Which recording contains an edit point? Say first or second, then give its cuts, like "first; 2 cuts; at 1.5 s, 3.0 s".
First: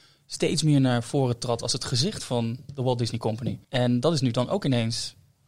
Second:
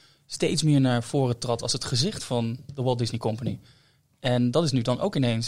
first; 1 cut; at 3.6 s